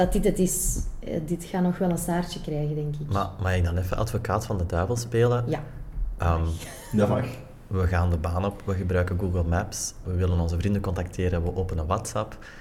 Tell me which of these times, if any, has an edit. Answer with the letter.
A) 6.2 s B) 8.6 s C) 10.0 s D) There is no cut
C